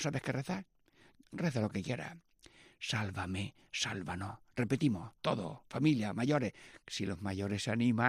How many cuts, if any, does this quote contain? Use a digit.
0